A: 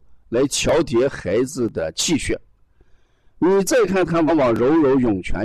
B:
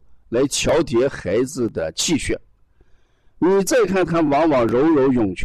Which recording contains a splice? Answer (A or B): A